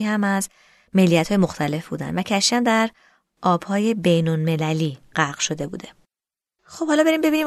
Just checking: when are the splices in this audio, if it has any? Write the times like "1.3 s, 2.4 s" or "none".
none